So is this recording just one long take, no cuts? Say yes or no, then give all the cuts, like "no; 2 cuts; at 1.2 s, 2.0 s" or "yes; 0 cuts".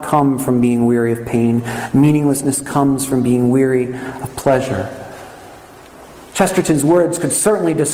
yes; 0 cuts